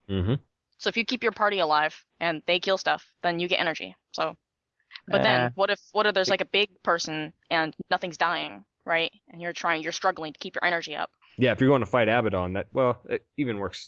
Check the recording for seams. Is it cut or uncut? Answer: uncut